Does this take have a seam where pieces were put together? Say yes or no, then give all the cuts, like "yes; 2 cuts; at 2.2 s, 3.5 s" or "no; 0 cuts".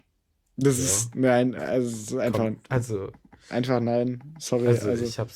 no; 0 cuts